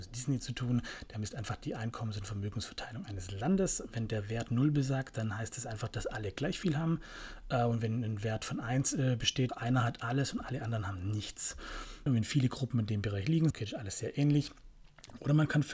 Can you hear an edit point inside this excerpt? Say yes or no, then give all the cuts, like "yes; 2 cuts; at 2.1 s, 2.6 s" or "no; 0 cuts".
yes; 3 cuts; at 9.5 s, 12.1 s, 13.5 s